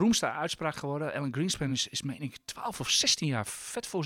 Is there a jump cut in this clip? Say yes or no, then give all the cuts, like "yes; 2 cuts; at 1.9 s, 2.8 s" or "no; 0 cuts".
no; 0 cuts